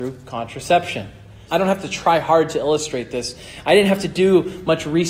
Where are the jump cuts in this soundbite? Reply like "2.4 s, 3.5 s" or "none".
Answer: 1.5 s